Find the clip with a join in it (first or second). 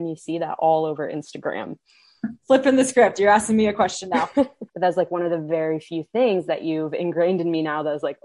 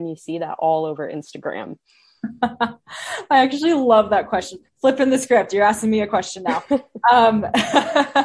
first